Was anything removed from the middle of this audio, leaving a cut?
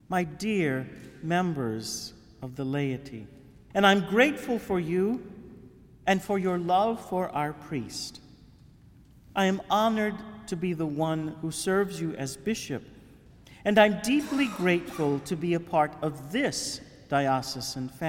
yes; 1 cut; at 3.7 s

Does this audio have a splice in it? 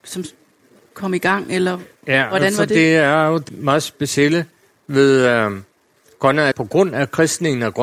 yes; 2 cuts; at 3.5 s, 6.5 s

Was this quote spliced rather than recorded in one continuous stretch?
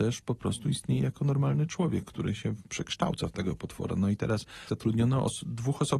yes; 1 cut; at 4.7 s

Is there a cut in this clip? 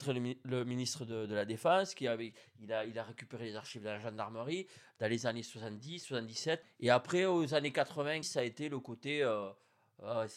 yes; 2 cuts; at 6.6 s, 8.2 s

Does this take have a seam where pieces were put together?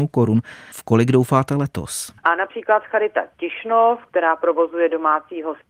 yes; 1 cut; at 2.2 s

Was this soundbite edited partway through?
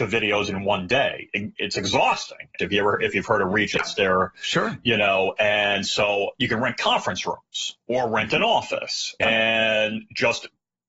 yes; 2 cuts; at 2.6 s, 9.2 s

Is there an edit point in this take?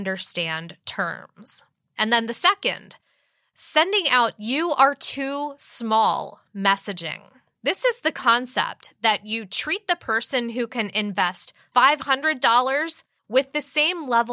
no; 0 cuts

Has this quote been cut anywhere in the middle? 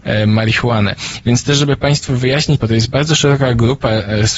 yes; 2 cuts; at 1.2 s, 2.6 s

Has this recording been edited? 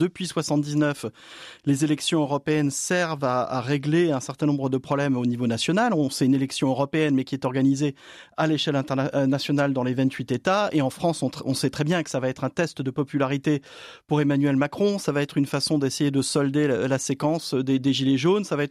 no; 0 cuts

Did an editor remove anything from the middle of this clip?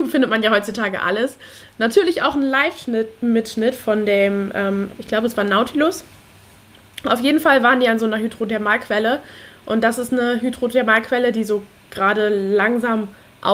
yes; 1 cut; at 4.9 s

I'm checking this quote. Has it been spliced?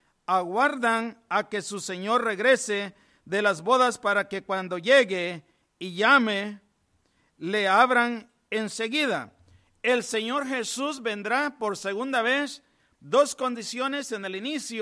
yes; 1 cut; at 12.9 s

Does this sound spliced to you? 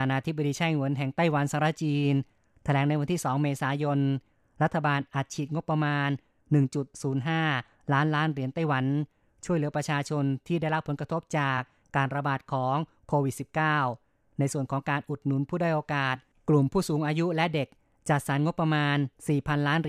no; 0 cuts

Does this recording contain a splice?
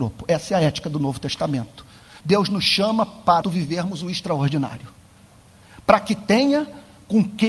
yes; 2 cuts; at 2.2 s, 3.4 s

